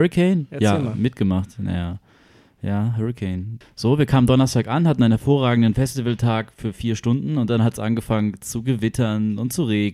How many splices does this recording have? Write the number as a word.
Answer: one